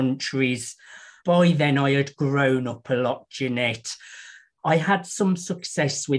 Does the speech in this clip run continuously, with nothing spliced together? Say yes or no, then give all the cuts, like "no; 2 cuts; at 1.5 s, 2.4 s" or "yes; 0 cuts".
no; 2 cuts; at 1.2 s, 4.6 s